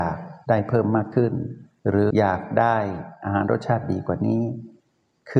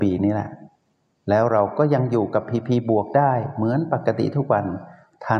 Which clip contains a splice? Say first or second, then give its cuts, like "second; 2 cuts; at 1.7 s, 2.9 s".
first; 1 cut; at 2.1 s